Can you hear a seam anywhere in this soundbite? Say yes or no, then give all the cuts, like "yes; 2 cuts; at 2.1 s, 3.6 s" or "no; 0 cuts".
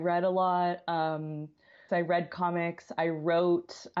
yes; 1 cut; at 1.9 s